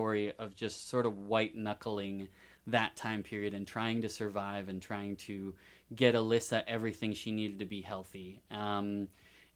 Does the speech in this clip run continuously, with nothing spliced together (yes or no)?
yes